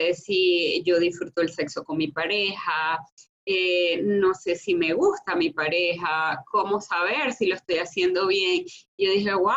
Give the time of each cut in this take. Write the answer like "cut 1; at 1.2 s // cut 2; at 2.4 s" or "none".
none

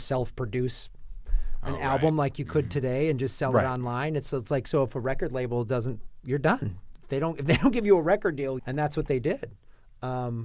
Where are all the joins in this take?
cut 1; at 8.6 s

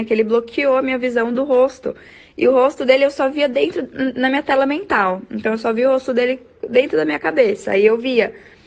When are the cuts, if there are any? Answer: none

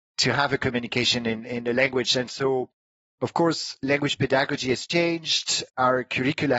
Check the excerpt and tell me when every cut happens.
none

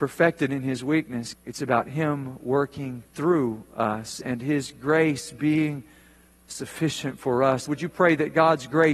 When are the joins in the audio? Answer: cut 1; at 1.3 s // cut 2; at 3.1 s // cut 3; at 7.7 s

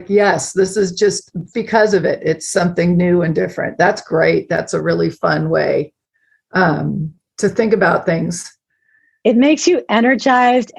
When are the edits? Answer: cut 1; at 1.5 s

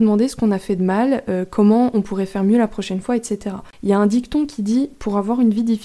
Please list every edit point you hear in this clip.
cut 1; at 3.7 s

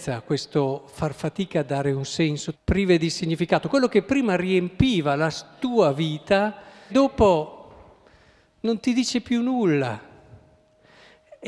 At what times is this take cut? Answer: cut 1; at 2.5 s // cut 2; at 6.9 s

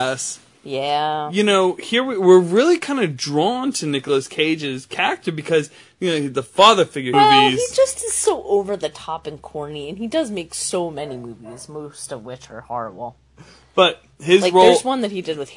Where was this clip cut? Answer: cut 1; at 7.1 s

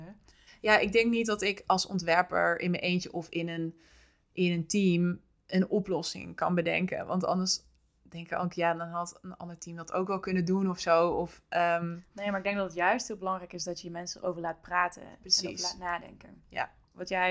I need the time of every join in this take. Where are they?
none

